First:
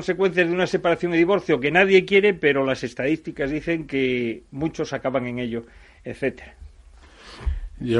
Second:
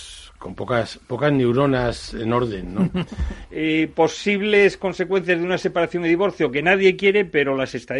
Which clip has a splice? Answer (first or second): second